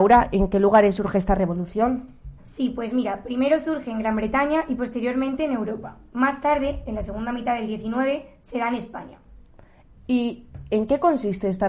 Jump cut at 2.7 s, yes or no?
no